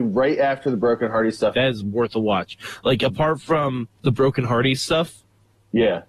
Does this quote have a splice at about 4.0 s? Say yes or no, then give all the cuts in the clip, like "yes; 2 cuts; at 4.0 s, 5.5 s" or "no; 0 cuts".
yes; 2 cuts; at 1.5 s, 4.0 s